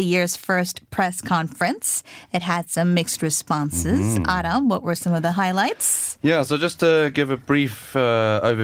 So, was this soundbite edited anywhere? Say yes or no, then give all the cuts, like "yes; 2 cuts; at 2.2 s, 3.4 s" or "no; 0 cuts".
no; 0 cuts